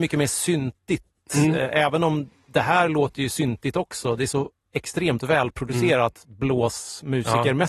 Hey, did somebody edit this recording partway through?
no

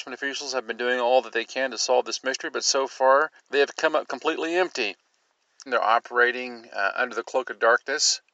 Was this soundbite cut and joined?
yes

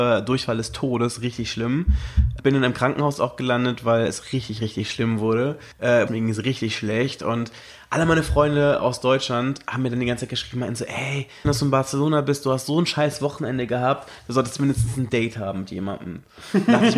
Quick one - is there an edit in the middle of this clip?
yes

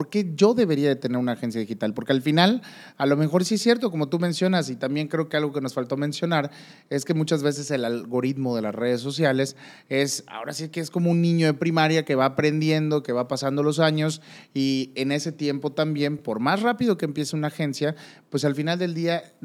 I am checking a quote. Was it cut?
no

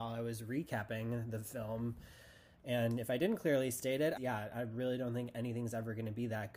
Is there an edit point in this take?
yes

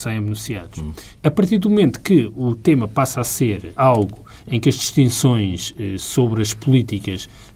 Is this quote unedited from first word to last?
no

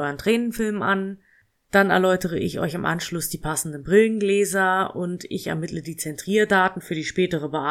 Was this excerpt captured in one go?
no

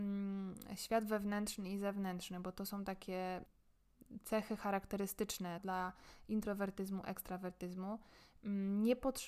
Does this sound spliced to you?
yes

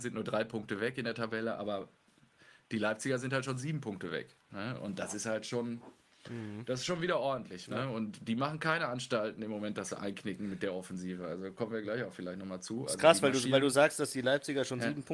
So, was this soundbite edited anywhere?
no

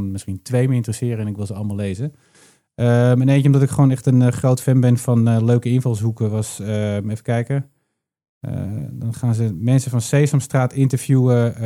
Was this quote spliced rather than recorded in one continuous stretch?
no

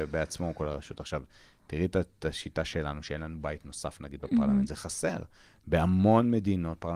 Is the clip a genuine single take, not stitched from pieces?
yes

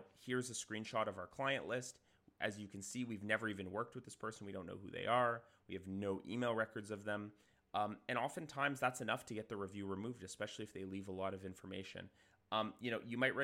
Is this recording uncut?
yes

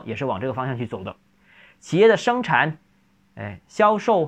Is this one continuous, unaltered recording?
yes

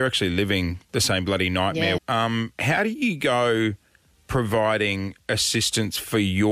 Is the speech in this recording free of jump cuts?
no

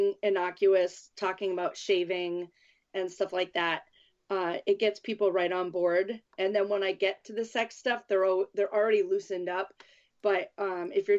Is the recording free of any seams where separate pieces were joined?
yes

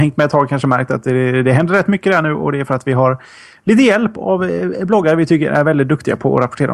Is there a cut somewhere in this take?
no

